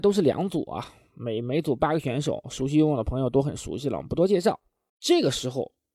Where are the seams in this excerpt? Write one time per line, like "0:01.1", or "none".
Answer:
0:04.9